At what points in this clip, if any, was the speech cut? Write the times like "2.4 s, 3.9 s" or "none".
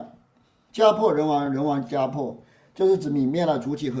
none